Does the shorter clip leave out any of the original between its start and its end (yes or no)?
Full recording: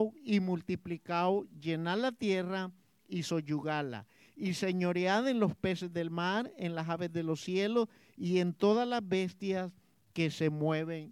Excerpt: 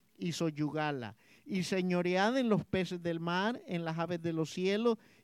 no